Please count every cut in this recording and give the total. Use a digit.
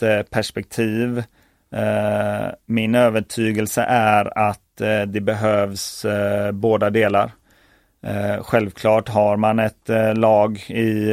0